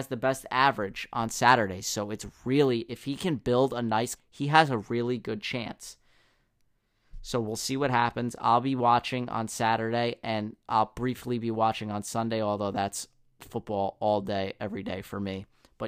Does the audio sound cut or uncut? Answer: cut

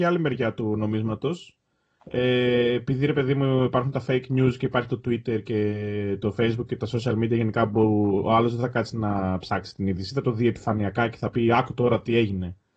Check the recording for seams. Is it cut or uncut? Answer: uncut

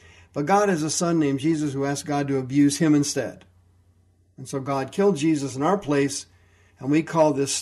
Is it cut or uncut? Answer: uncut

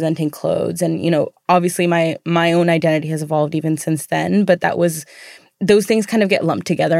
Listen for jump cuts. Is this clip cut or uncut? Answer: uncut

